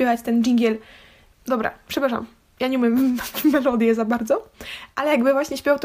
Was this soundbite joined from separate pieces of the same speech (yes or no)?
yes